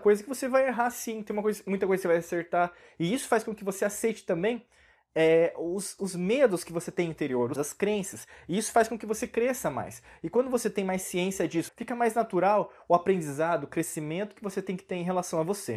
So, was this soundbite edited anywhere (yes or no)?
yes